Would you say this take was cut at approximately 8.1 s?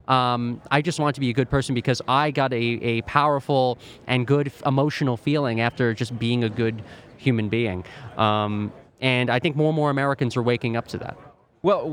no; 1 cut; at 1.0 s

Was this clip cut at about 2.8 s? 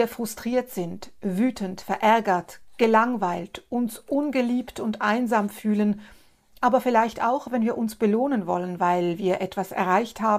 no; 0 cuts

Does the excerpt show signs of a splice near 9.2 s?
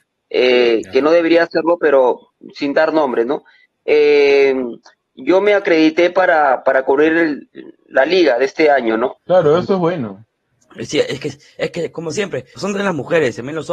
yes; 2 cuts; at 9.2 s, 12.5 s

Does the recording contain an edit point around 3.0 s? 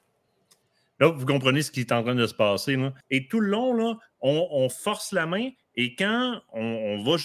yes; 1 cut; at 3.0 s

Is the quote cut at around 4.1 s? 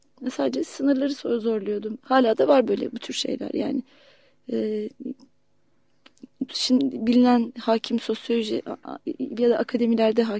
no; 2 cuts; at 2.0 s, 6.5 s

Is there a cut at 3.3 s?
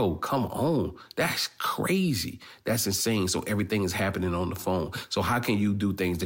no; 0 cuts

